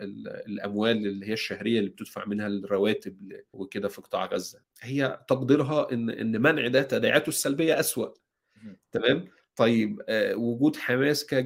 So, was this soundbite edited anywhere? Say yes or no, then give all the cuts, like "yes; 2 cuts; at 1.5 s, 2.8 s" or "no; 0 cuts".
yes; 2 cuts; at 3.5 s, 4.6 s